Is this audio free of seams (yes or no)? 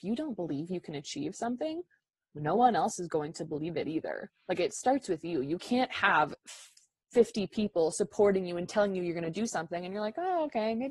yes